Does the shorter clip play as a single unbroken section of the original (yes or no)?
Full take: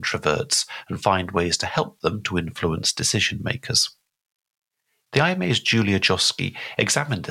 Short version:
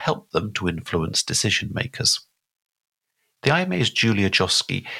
yes